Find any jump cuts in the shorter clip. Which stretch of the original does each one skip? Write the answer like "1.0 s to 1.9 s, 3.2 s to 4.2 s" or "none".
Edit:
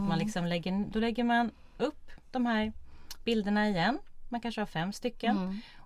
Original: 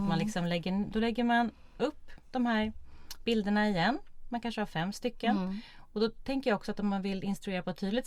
none